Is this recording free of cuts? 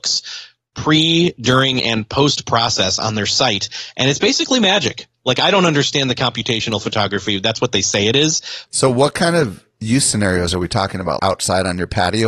no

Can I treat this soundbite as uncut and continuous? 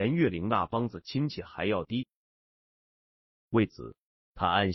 yes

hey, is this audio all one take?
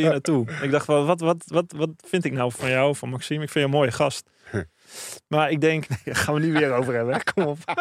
no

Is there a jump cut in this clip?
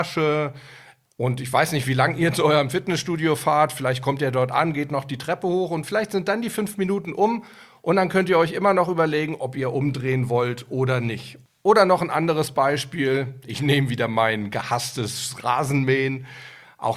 no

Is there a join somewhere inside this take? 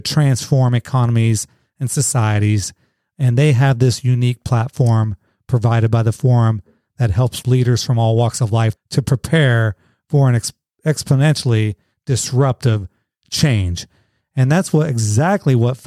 yes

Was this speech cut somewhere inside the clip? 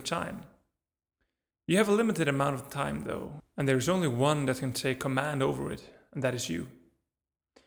yes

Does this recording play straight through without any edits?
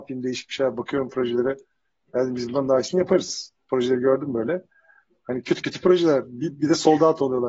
yes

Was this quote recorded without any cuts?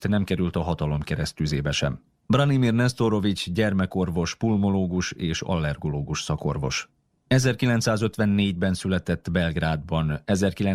no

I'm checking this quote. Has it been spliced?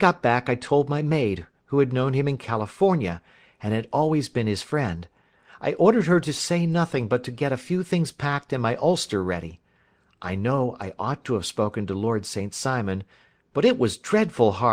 no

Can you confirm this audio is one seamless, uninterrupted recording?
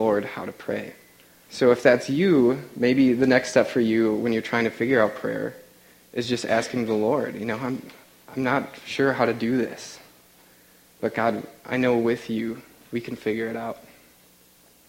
yes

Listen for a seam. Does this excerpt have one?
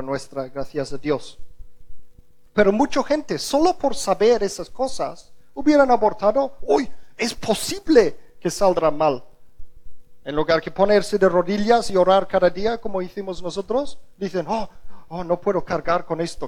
no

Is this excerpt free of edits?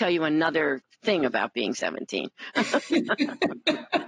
yes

